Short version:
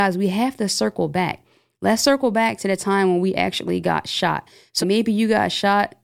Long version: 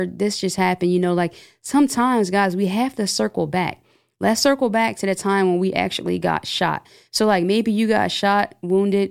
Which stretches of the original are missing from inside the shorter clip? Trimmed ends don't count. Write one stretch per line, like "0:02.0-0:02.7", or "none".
0:07.2-0:07.4